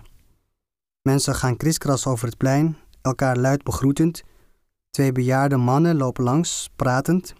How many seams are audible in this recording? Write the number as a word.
zero